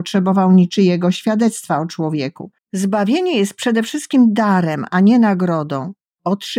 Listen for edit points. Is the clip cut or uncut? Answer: cut